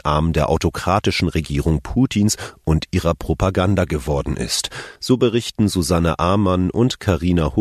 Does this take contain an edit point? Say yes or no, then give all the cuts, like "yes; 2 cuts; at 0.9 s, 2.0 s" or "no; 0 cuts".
yes; 1 cut; at 5.0 s